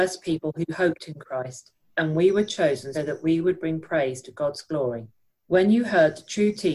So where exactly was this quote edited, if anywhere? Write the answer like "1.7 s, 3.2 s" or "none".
2.9 s, 5.3 s